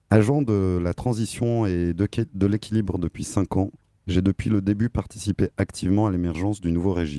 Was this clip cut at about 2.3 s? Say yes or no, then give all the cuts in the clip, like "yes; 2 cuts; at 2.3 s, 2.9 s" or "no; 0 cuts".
no; 0 cuts